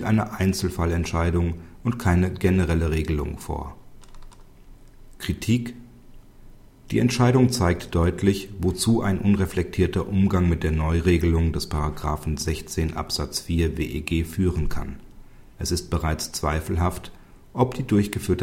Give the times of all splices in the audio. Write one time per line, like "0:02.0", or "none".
0:15.5